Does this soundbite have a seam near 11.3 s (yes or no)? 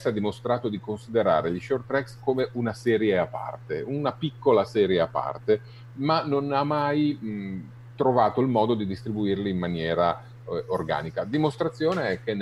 no